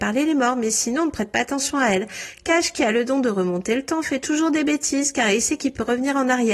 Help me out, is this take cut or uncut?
uncut